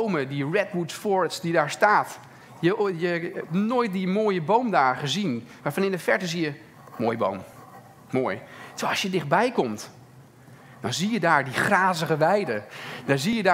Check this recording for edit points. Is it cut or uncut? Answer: uncut